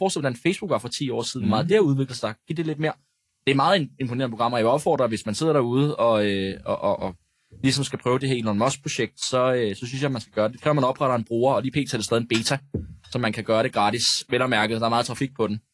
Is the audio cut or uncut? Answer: uncut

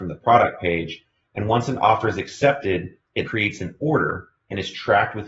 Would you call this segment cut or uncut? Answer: cut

